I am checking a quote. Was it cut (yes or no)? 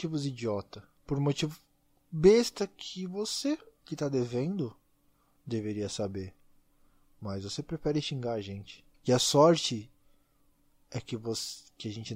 yes